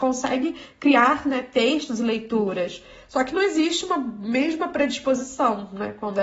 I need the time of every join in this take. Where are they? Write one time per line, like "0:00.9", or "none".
none